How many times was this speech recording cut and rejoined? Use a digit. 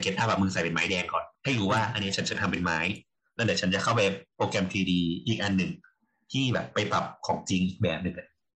1